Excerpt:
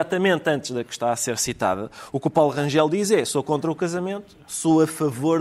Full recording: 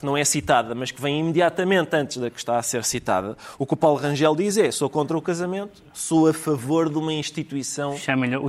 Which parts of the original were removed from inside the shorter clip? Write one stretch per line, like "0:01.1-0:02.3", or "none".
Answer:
none